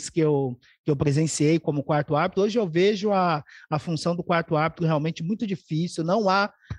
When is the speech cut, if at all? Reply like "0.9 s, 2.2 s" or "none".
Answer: none